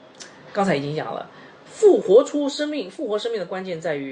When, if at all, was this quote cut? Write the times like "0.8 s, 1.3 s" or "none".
2.0 s